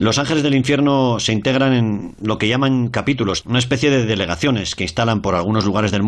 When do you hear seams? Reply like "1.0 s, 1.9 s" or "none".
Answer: 3.4 s